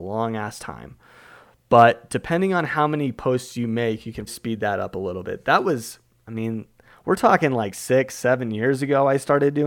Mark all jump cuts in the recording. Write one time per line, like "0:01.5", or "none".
0:04.3